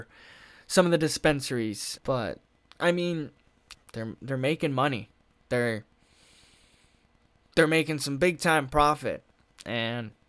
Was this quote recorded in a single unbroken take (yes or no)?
no